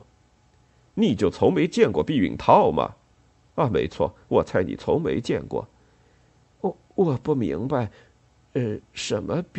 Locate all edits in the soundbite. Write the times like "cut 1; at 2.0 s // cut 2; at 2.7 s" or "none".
none